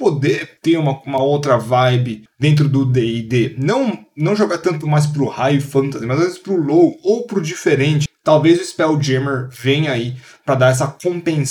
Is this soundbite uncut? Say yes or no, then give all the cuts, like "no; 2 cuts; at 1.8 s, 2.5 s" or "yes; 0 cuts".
yes; 0 cuts